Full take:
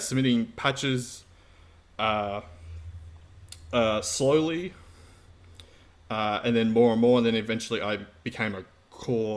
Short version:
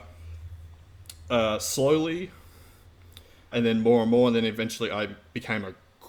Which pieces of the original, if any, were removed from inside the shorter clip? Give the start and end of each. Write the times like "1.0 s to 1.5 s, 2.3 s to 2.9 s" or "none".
5.9 s to 6.4 s